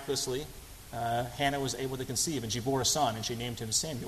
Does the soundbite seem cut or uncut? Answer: uncut